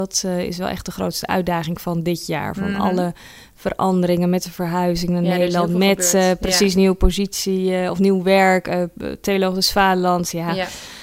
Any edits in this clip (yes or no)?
no